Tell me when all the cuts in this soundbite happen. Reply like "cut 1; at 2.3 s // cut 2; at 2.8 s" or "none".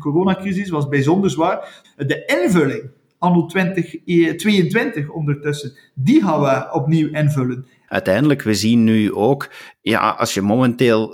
cut 1; at 1.8 s // cut 2; at 7.9 s